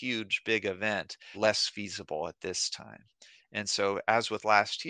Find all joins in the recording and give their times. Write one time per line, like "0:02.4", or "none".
0:01.3